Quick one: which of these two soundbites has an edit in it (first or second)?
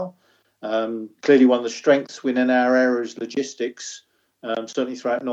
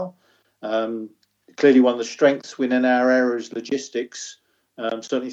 first